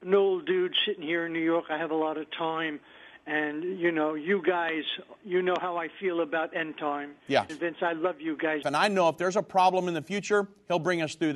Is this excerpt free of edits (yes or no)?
no